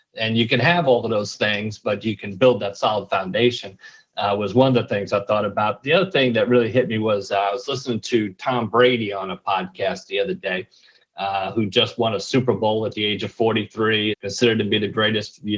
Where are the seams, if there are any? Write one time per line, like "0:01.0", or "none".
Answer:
0:14.1